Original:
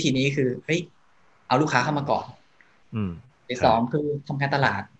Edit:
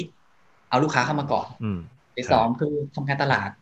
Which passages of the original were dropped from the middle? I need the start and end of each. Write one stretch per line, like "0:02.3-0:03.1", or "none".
0:02.3-0:02.9